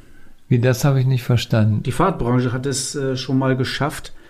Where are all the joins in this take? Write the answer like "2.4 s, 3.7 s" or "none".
1.8 s